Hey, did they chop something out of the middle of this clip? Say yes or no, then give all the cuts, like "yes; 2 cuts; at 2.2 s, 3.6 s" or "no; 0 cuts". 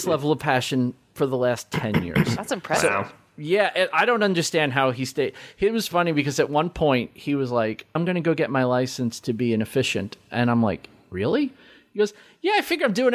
yes; 1 cut; at 8.0 s